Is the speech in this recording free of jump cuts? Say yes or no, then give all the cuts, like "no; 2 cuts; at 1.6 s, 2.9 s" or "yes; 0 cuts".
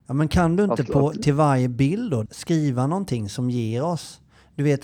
no; 1 cut; at 2.3 s